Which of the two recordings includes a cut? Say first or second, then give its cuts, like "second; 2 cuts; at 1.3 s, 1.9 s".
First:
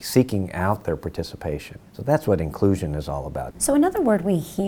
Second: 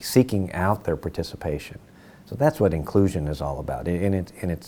first; 2 cuts; at 1.9 s, 3.5 s